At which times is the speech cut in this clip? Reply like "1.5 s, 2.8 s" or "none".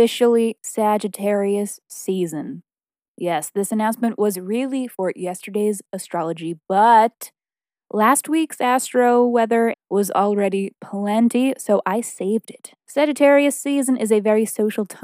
9.7 s, 12.9 s